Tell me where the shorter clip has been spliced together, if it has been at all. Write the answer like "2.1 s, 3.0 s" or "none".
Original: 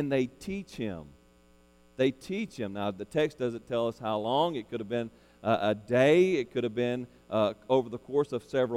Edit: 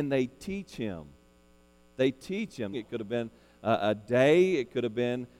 2.7 s